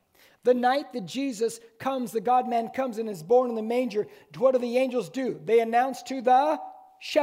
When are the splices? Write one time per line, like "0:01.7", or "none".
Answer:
none